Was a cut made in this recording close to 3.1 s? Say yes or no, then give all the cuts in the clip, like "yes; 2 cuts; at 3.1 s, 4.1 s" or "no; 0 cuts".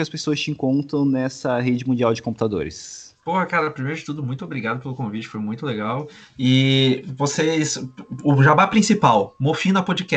no; 0 cuts